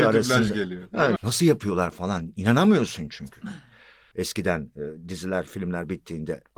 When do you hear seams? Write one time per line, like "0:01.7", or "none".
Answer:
0:01.2
0:04.1